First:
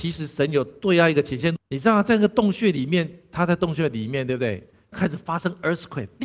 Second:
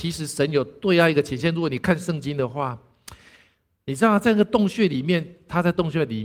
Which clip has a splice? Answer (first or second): first